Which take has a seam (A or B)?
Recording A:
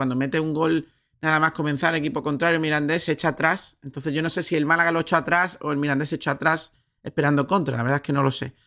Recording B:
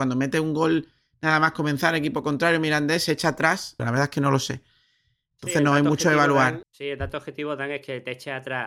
B